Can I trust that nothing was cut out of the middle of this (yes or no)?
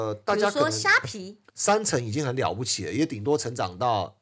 no